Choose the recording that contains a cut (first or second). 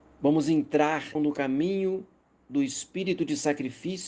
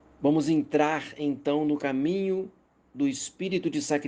first